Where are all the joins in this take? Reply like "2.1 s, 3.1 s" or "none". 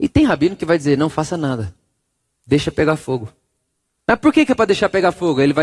4.0 s